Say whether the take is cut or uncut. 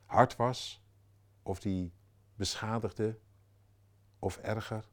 uncut